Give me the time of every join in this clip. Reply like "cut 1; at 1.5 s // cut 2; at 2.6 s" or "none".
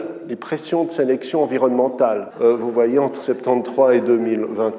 cut 1; at 2.3 s